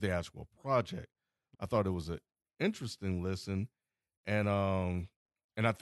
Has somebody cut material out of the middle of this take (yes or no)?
yes